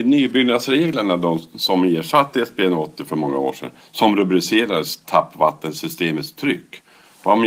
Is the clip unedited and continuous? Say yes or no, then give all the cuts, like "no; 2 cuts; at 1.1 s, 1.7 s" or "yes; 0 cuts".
no; 1 cut; at 3.8 s